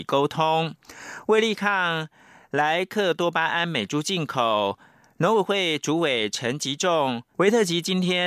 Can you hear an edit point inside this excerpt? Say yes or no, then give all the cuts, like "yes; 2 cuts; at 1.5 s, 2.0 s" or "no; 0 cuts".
yes; 1 cut; at 7.3 s